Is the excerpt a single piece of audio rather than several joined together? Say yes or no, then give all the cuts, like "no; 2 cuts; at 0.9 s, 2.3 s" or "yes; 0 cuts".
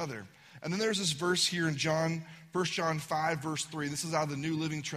yes; 0 cuts